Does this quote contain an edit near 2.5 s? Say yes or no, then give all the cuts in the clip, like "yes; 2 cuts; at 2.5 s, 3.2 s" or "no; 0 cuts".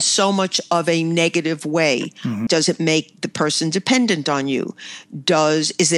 yes; 1 cut; at 2.5 s